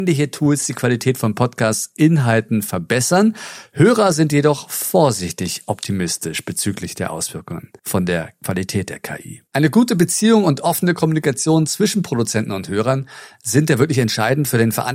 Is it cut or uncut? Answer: cut